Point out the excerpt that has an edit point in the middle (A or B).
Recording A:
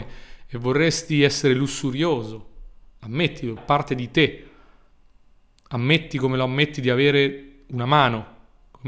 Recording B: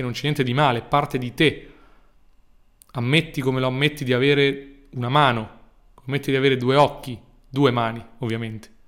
A